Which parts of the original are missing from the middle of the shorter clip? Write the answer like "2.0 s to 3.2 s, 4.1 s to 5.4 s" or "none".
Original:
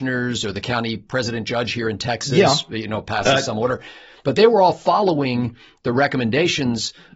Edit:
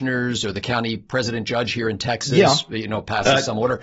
none